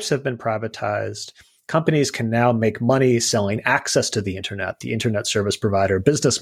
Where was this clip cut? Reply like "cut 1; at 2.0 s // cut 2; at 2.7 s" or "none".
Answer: none